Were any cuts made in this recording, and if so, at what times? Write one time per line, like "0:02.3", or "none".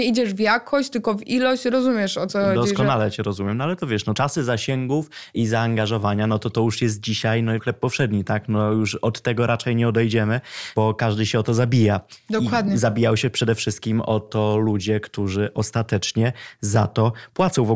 none

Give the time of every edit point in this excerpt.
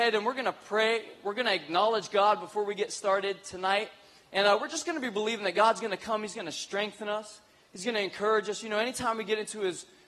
none

